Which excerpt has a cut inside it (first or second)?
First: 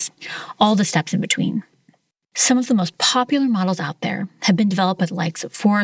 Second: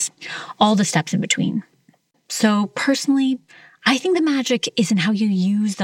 second